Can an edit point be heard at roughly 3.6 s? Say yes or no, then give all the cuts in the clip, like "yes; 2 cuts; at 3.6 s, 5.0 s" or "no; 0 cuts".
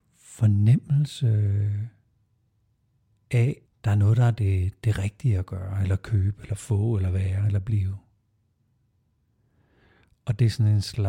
yes; 1 cut; at 3.6 s